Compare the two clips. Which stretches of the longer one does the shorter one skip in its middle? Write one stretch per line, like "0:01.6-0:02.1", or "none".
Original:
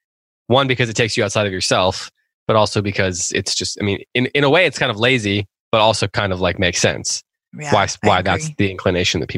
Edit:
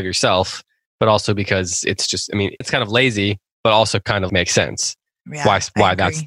0:04.1-0:04.7
0:06.4-0:06.6